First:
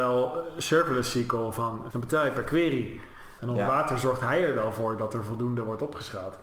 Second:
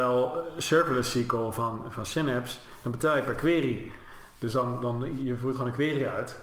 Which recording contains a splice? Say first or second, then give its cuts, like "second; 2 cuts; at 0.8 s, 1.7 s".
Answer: first; 2 cuts; at 1.9 s, 3.4 s